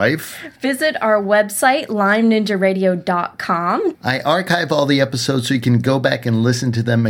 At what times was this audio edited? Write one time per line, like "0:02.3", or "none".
0:03.9